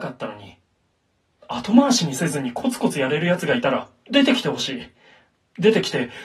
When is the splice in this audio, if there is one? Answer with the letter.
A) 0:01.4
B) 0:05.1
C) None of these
A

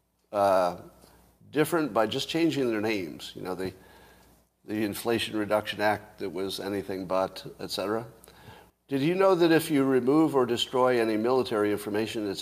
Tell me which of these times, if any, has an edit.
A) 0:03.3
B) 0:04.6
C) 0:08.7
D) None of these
C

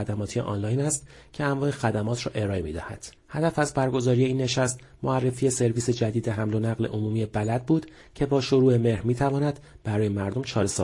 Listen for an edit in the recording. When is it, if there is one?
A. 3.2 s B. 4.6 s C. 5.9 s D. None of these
A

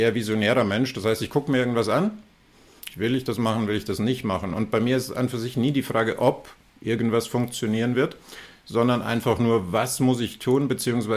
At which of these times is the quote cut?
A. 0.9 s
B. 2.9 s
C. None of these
B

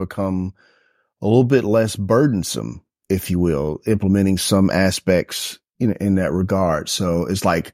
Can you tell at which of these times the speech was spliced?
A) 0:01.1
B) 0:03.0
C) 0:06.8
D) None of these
D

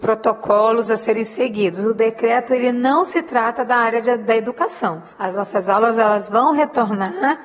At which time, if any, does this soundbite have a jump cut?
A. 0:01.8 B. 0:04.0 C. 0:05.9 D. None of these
D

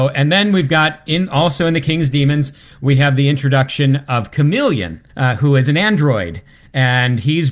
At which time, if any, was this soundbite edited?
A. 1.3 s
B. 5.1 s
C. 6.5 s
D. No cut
B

